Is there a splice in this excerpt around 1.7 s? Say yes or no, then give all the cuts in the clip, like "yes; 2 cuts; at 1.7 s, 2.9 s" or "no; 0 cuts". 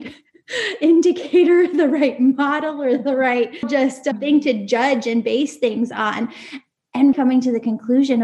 no; 2 cuts; at 3.6 s, 7.1 s